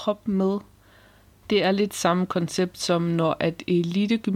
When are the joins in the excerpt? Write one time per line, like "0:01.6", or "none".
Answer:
0:01.4